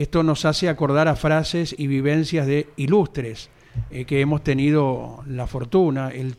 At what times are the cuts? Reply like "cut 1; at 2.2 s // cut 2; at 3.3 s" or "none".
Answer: none